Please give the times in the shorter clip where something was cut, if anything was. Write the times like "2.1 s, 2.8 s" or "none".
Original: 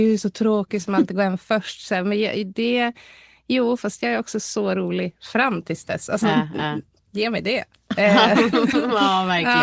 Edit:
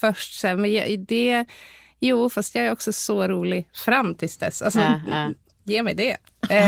none